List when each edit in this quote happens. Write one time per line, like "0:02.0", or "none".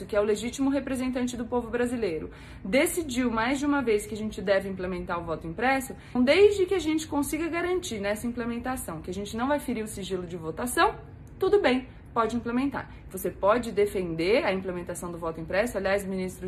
0:06.2
0:13.1